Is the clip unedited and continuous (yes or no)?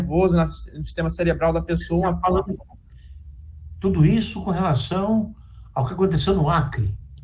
yes